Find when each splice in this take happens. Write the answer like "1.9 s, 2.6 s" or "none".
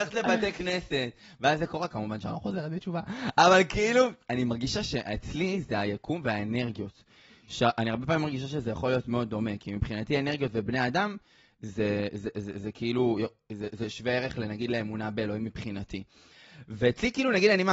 none

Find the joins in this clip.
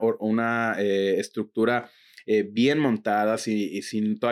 none

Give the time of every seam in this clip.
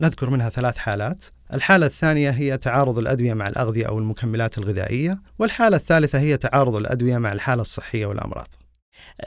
1.5 s, 5.3 s

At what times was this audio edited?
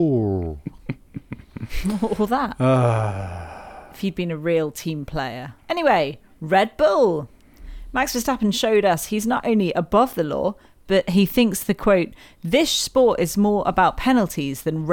5.6 s

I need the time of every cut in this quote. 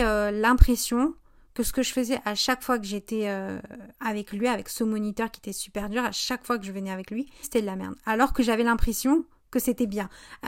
3.9 s, 7.4 s

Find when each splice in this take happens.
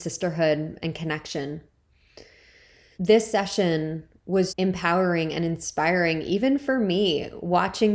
2.9 s, 4.5 s

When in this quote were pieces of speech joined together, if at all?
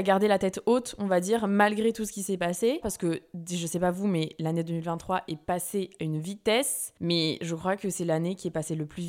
2.8 s

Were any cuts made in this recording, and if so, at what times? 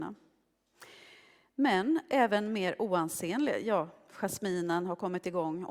none

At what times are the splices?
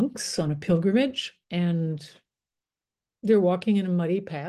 1.4 s

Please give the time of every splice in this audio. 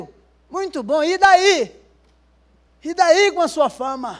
2.7 s

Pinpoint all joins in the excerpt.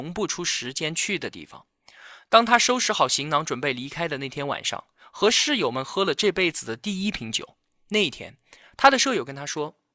none

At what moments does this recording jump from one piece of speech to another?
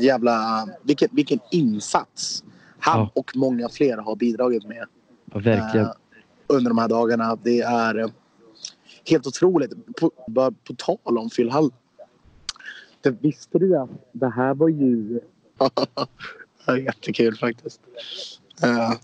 10.3 s, 15.6 s

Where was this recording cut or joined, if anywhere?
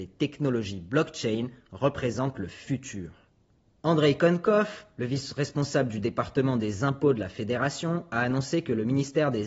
none

